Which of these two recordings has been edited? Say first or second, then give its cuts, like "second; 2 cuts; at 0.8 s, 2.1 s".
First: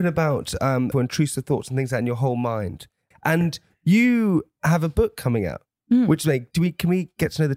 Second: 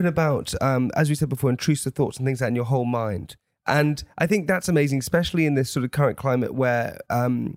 first; 2 cuts; at 0.9 s, 3.1 s